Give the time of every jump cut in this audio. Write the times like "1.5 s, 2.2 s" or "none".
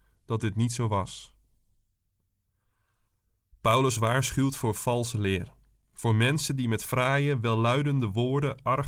none